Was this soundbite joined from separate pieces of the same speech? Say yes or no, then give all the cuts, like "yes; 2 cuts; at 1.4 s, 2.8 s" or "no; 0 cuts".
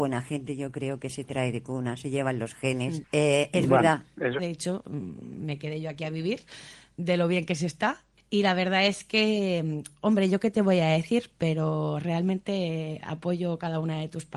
yes; 1 cut; at 4.4 s